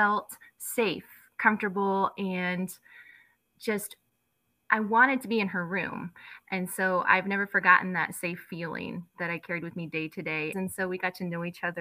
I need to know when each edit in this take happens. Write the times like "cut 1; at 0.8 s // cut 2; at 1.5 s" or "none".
cut 1; at 9.1 s // cut 2; at 10.5 s